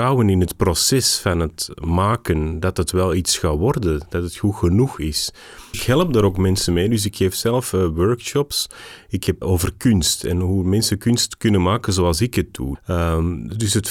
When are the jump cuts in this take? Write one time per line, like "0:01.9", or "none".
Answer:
0:05.7
0:09.4
0:12.7